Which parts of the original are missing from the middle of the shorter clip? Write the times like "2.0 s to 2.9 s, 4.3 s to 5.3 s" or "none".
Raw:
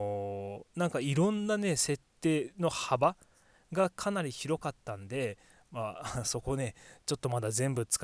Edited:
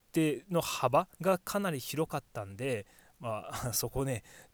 3.2 s to 3.6 s